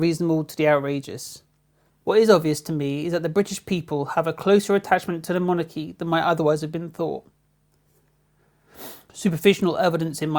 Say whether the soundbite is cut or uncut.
cut